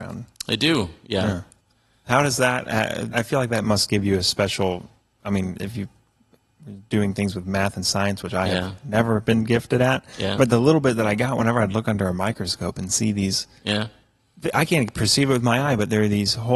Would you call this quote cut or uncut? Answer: cut